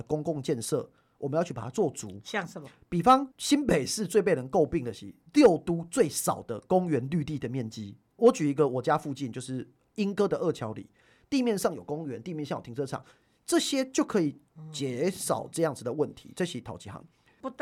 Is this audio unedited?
no; 2 cuts; at 3.3 s, 11.2 s

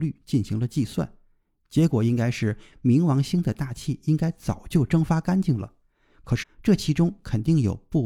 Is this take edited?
yes; 1 cut; at 6.4 s

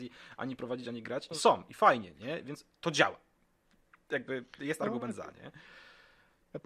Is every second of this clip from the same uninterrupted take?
yes; 0 cuts

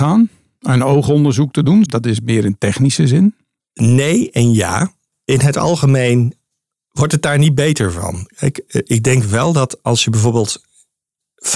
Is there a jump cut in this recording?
yes; 1 cut; at 1.9 s

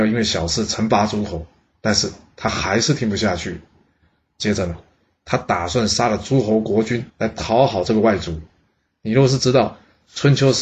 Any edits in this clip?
yes; 2 cuts; at 7.1 s, 8.9 s

